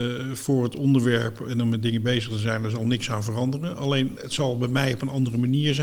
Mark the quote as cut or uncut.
uncut